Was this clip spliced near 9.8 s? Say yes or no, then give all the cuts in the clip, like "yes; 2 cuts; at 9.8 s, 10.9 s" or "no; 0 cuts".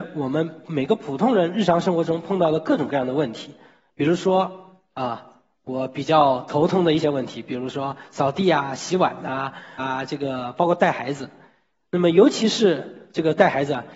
yes; 1 cut; at 9.8 s